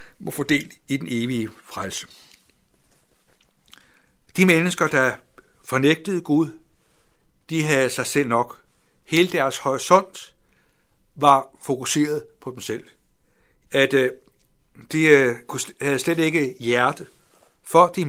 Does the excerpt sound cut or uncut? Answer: cut